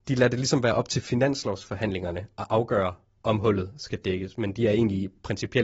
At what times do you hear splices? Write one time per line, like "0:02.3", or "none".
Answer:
none